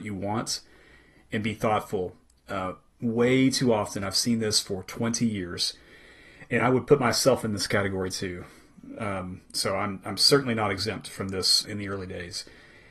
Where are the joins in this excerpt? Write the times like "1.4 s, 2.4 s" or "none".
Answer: 11.6 s